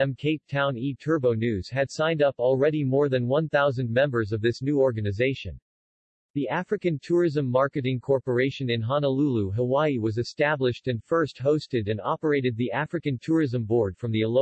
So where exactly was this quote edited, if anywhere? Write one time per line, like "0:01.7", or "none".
none